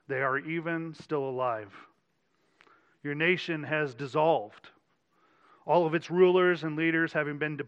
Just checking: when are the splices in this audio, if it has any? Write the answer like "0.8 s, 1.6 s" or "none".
none